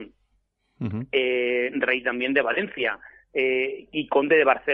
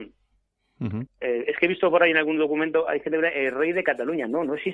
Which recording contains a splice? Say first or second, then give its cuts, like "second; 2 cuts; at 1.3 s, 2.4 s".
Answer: second; 1 cut; at 1.1 s